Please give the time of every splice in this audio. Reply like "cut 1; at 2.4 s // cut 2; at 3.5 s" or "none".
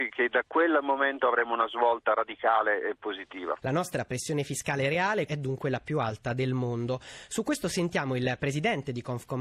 cut 1; at 3.6 s // cut 2; at 5.3 s